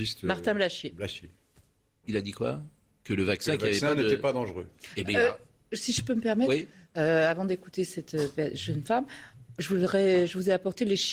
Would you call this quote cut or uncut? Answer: uncut